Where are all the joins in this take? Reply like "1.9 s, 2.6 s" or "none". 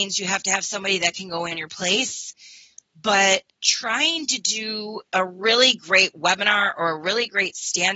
3.5 s, 5.1 s